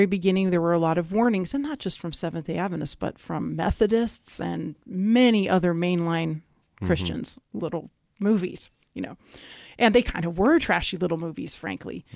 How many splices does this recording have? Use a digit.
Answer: 1